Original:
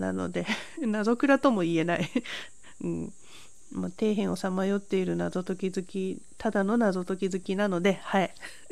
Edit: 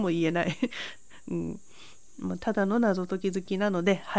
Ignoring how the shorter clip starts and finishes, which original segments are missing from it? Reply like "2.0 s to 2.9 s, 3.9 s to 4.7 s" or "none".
3.9 s to 6.4 s